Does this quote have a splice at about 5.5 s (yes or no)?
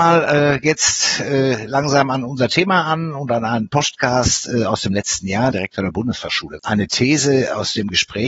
yes